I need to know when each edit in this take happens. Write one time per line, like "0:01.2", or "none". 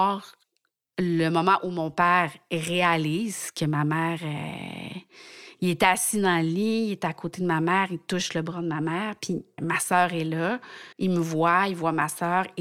0:09.6
0:10.9